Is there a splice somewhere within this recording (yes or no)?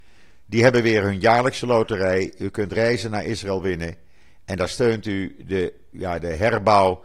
yes